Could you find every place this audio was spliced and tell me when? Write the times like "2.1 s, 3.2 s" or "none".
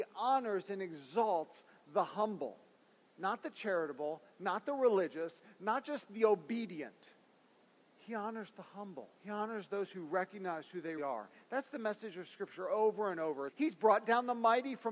9.2 s, 11.0 s, 13.5 s